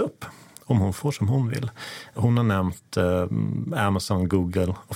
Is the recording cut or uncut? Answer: uncut